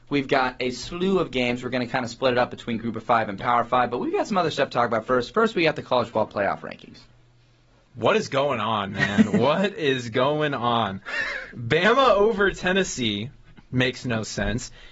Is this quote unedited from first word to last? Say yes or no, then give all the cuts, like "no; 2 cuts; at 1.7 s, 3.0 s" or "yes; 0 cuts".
yes; 0 cuts